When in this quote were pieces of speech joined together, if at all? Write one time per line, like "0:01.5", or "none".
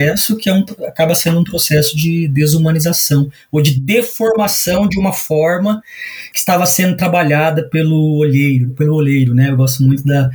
none

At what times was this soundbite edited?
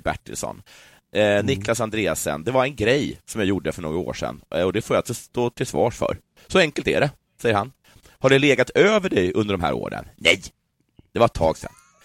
none

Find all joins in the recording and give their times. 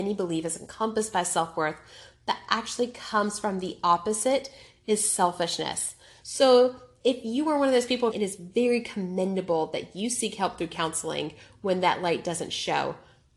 0:06.2
0:08.1

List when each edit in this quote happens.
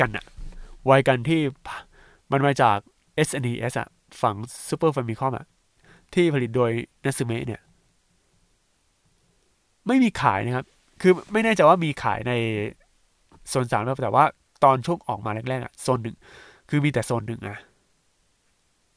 none

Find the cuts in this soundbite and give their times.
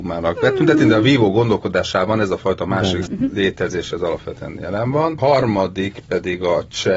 0:03.1

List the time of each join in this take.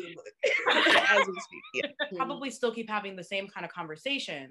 0:02.1

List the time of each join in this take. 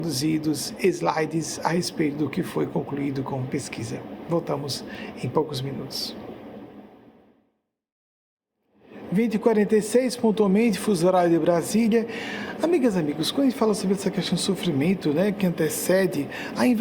none

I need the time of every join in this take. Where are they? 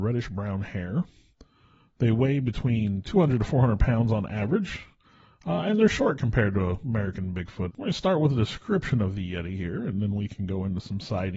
0:07.7

